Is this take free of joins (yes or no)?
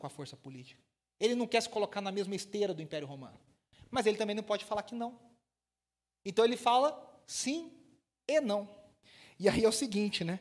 yes